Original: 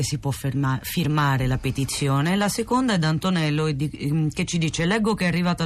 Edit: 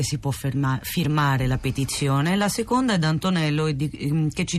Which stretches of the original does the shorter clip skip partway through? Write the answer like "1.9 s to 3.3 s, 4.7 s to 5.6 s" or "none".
none

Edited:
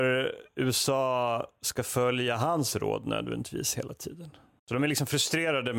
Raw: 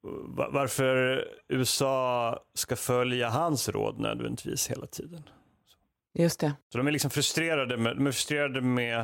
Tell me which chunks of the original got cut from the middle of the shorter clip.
5.5 s to 6.6 s

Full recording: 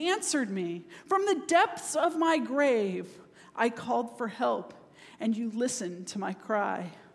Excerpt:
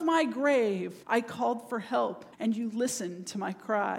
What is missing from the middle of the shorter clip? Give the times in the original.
3.2 s to 3.5 s, 4.8 s to 5.1 s

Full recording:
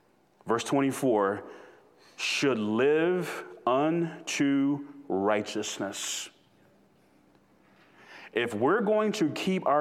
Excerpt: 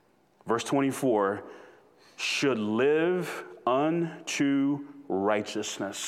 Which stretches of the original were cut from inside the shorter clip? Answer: none

